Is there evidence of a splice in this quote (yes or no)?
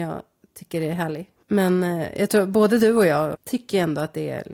yes